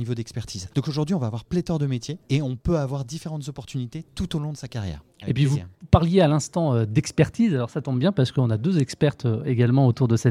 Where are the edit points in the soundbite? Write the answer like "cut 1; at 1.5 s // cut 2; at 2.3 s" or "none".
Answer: cut 1; at 5.2 s